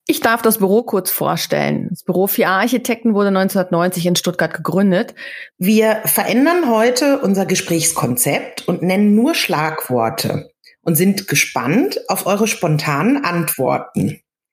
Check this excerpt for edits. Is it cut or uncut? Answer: cut